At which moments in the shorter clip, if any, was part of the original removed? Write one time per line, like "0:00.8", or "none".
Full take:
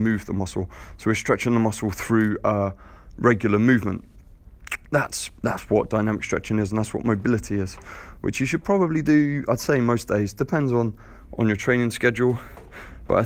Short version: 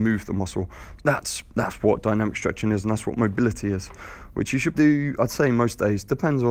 0:01.0
0:04.7